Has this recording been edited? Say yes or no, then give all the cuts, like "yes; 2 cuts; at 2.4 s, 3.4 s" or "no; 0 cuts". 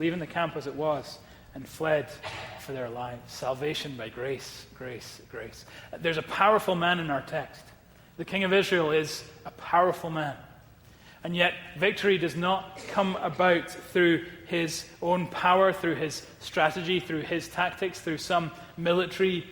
no; 0 cuts